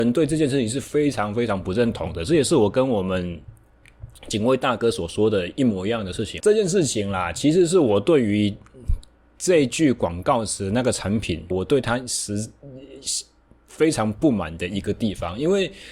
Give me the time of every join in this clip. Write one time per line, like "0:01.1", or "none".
0:06.4
0:11.5